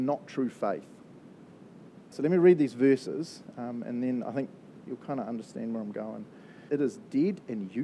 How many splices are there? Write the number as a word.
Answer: two